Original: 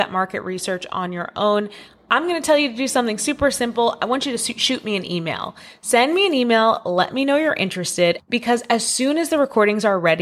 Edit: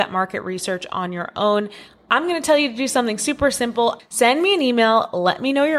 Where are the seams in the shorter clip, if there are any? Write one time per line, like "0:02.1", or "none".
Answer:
0:04.0